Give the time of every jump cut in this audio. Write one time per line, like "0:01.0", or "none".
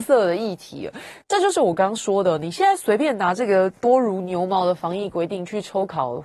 0:01.2